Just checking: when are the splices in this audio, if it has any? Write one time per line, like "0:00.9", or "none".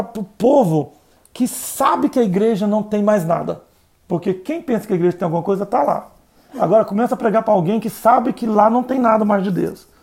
none